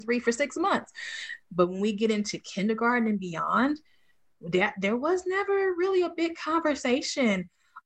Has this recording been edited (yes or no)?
yes